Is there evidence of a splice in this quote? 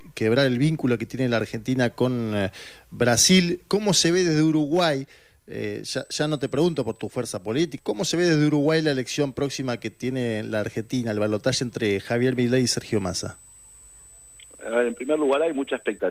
yes; 1 cut; at 7.8 s

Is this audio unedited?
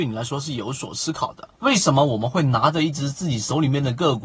no; 1 cut; at 1.5 s

